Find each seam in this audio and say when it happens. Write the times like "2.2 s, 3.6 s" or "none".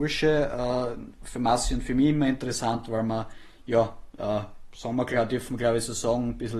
none